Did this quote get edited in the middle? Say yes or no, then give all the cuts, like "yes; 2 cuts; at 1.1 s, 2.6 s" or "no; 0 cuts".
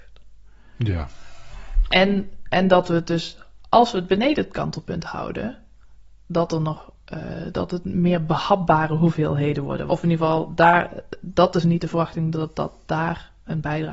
yes; 1 cut; at 9.9 s